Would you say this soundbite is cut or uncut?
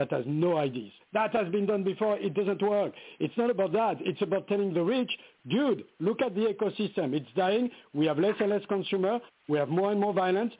cut